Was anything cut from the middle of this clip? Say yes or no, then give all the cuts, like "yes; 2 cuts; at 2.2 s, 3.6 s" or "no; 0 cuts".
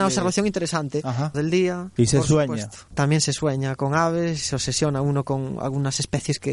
yes; 2 cuts; at 1.3 s, 2.9 s